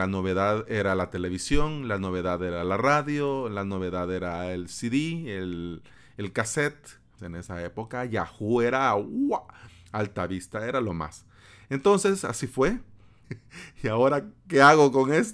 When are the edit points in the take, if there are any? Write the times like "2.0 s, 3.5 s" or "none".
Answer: 7.2 s, 13.2 s